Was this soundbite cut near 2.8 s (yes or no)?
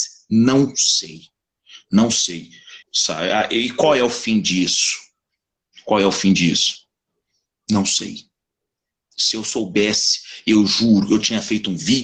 yes